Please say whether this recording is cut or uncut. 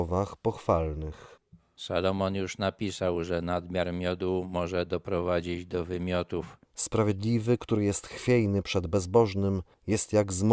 cut